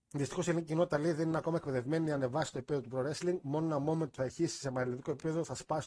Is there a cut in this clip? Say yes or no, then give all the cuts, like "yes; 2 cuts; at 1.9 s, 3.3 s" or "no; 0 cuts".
no; 0 cuts